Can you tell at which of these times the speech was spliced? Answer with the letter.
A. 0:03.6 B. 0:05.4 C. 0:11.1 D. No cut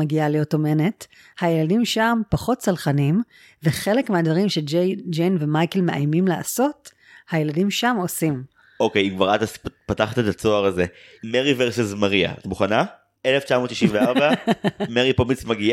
D